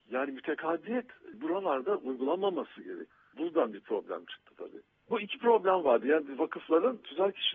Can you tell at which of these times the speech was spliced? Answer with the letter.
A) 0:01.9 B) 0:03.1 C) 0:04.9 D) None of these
D